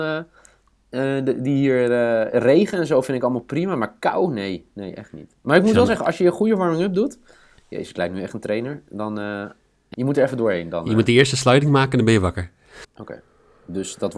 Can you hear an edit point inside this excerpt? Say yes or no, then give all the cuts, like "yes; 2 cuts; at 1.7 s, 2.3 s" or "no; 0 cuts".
yes; 2 cuts; at 9.9 s, 12.8 s